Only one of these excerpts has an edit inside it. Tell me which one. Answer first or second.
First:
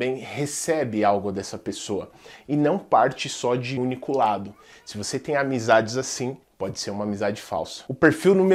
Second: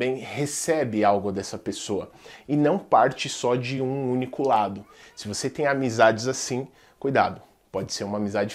first